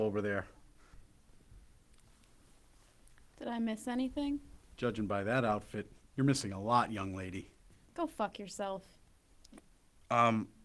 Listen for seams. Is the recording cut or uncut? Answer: uncut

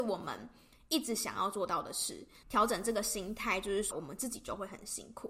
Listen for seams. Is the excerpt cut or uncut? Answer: cut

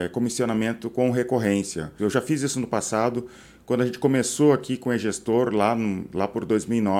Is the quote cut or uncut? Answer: cut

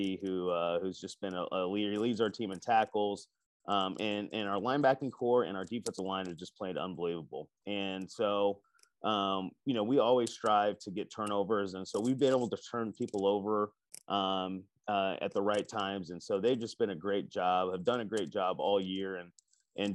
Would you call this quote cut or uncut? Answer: uncut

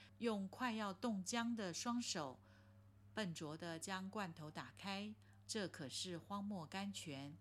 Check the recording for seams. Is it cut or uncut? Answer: cut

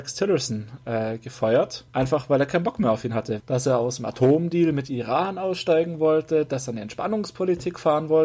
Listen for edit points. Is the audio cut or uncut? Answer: cut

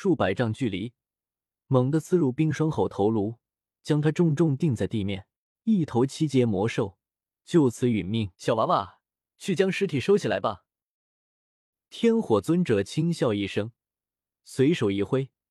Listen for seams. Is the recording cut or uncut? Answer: cut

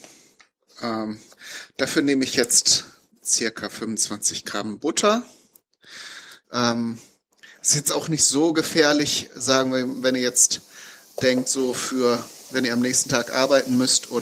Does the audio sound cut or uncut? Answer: cut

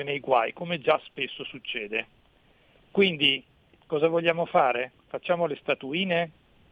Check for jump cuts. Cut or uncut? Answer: cut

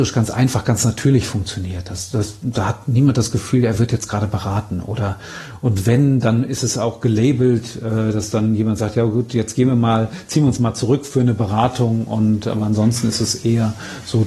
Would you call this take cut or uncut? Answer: uncut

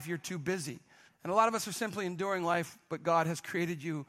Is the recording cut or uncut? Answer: cut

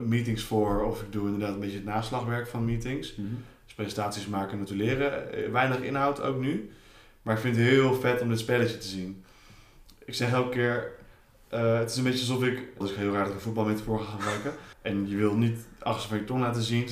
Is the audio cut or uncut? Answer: cut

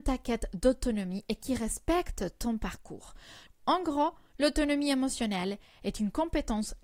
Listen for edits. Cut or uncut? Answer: cut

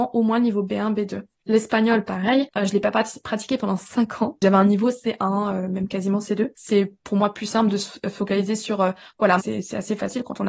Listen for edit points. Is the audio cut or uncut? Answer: cut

